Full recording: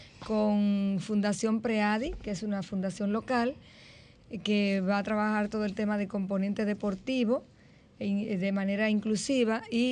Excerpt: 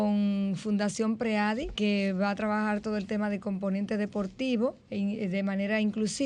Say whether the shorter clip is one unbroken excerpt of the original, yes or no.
no